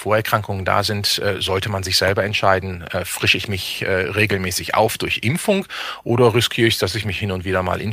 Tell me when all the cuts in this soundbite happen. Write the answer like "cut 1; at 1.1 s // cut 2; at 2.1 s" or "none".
none